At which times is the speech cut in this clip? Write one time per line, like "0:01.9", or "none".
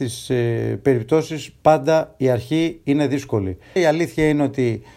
0:03.8